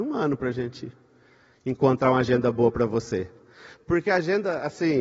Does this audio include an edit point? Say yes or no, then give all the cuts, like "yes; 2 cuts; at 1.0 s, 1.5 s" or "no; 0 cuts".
no; 0 cuts